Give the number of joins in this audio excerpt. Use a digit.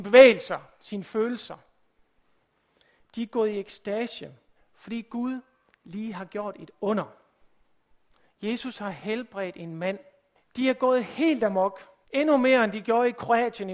3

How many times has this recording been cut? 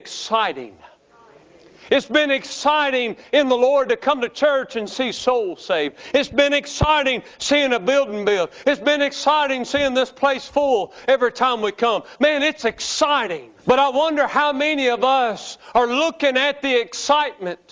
1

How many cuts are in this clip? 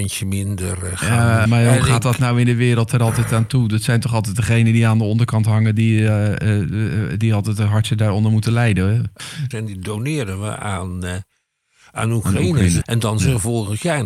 3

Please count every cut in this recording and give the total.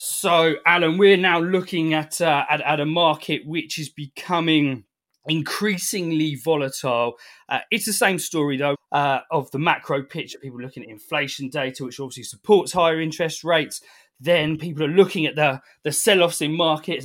1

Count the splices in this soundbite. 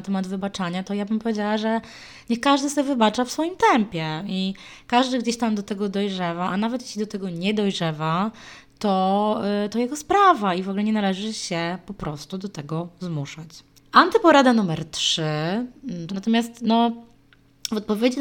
2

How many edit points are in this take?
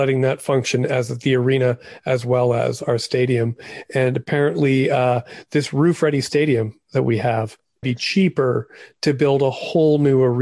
1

